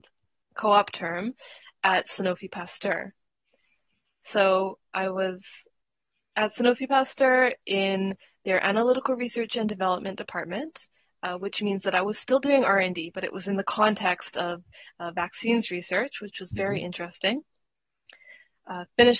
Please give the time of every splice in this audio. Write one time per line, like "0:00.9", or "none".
none